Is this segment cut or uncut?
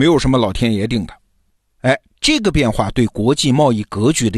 uncut